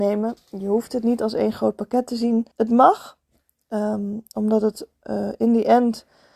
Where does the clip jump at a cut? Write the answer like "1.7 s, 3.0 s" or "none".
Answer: 2.5 s